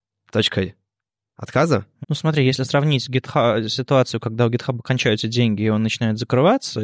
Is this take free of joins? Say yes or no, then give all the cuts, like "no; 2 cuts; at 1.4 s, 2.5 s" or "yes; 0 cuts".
no; 1 cut; at 2.0 s